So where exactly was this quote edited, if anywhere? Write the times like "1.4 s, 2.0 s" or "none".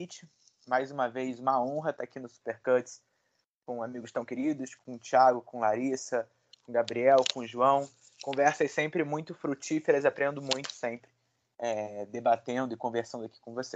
none